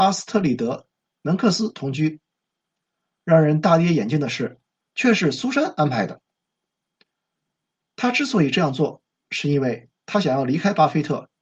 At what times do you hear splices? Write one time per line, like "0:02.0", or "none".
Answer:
0:04.8